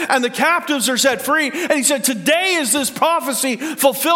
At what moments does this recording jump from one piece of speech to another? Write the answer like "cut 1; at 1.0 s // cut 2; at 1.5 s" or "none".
none